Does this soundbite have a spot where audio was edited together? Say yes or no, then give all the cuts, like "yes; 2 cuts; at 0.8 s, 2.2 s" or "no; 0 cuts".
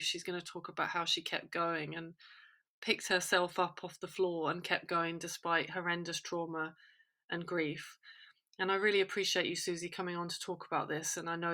no; 0 cuts